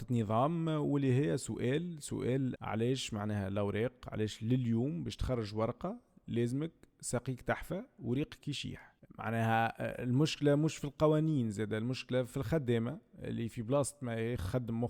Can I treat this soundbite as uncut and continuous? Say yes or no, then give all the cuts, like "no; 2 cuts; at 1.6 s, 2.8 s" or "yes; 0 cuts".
no; 1 cut; at 2.6 s